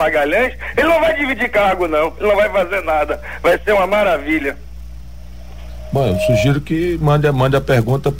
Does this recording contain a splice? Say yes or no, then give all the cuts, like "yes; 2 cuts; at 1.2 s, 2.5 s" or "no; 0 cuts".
no; 0 cuts